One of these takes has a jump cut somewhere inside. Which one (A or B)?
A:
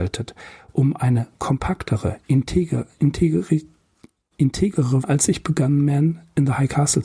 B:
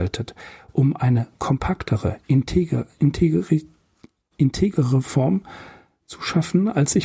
A